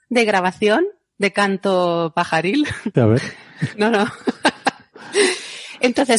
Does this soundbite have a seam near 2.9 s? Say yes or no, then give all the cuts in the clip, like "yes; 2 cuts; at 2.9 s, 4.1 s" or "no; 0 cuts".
yes; 1 cut; at 2.9 s